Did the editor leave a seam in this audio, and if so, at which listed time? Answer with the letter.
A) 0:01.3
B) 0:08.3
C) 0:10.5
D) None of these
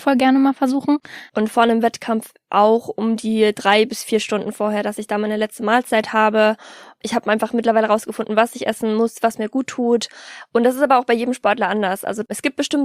A